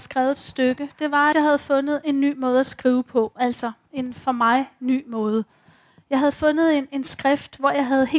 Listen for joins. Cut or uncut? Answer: cut